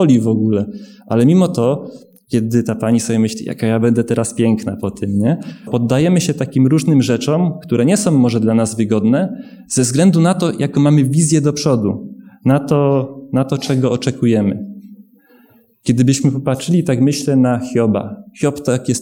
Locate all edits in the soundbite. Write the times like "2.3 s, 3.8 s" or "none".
5.7 s, 15.8 s